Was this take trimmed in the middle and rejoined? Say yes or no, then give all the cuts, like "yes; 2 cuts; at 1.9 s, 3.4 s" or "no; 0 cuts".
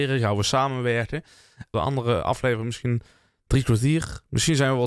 yes; 1 cut; at 1.7 s